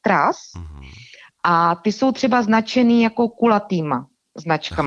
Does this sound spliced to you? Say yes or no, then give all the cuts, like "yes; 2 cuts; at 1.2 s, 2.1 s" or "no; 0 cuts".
no; 0 cuts